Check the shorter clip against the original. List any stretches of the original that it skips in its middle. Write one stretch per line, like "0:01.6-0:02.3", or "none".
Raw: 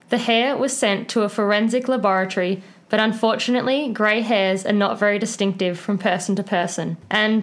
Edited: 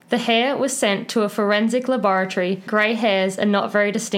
0:02.7-0:03.9